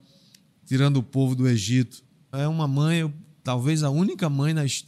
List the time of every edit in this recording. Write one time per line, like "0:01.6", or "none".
0:02.3